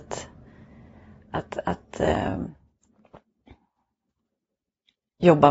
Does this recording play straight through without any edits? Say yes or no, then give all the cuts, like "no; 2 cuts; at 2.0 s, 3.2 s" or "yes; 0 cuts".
yes; 0 cuts